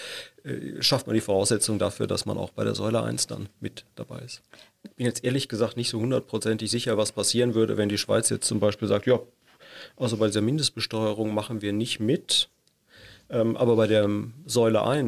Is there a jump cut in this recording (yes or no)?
yes